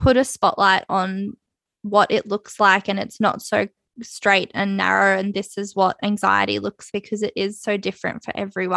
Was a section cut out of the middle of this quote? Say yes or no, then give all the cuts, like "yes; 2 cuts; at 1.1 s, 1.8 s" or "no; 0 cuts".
yes; 1 cut; at 6.9 s